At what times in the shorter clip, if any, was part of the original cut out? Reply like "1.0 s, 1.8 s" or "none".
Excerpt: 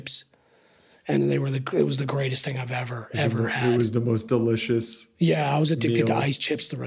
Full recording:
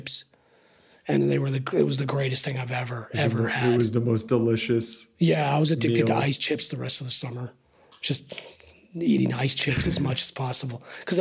none